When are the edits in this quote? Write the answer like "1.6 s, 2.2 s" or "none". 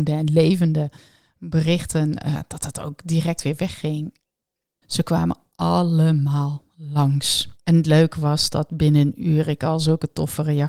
4.8 s, 7.5 s